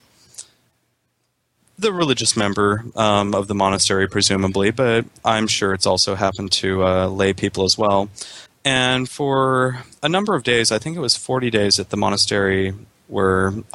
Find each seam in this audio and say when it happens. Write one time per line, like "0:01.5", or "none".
0:08.5